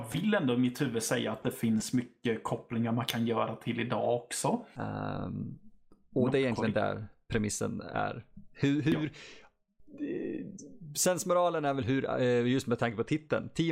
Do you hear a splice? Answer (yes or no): yes